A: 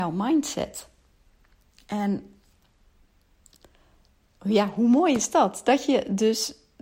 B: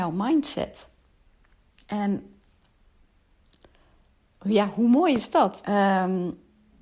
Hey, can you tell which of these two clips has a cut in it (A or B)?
B